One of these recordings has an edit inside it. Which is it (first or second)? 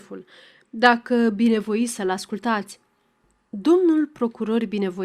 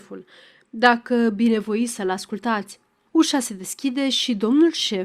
second